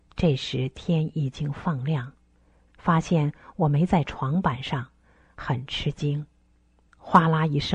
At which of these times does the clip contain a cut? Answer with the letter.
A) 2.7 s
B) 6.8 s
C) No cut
A